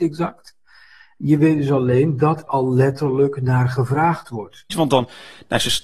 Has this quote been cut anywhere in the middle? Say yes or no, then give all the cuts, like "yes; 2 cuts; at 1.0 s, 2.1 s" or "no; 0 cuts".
yes; 2 cuts; at 2.5 s, 4.7 s